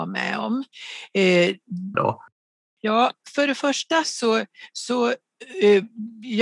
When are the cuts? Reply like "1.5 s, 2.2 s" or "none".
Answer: 1.9 s

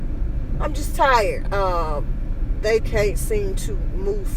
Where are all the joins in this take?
1.5 s, 2.8 s

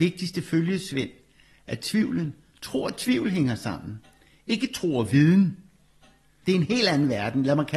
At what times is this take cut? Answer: 6.4 s

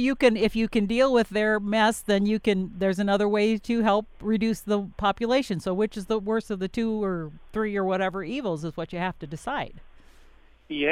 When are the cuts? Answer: none

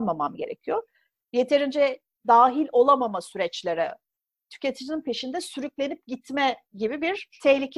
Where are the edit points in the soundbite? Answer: 1.3 s

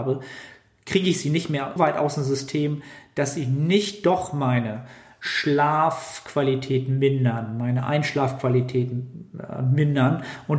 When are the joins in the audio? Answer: 1.8 s

